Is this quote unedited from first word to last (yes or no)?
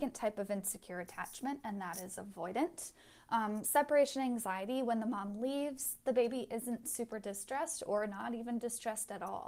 yes